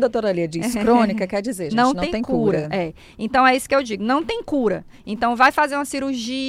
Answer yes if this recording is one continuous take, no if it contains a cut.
yes